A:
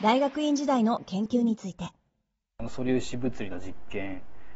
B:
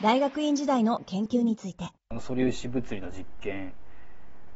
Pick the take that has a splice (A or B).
B